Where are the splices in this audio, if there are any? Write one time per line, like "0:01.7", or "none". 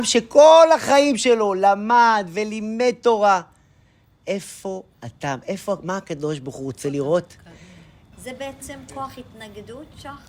0:08.1